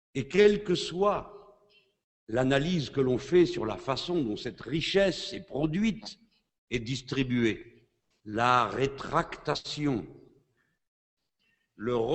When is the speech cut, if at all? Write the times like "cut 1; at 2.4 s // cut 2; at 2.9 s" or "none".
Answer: cut 1; at 8.2 s